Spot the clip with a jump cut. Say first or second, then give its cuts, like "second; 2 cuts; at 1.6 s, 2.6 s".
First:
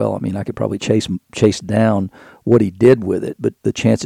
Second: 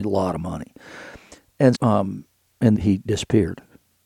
second; 2 cuts; at 1.7 s, 2.7 s